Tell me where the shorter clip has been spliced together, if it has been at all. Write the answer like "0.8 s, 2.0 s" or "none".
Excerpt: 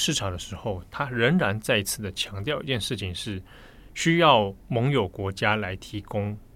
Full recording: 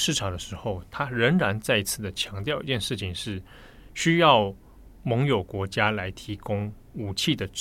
4.6 s